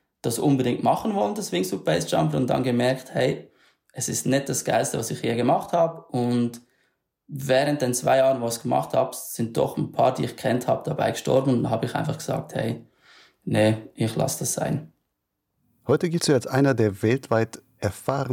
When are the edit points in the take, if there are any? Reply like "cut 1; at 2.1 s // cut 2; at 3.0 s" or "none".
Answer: none